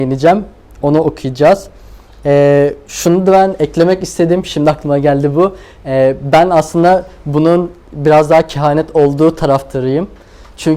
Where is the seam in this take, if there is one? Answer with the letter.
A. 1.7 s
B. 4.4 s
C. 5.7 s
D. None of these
D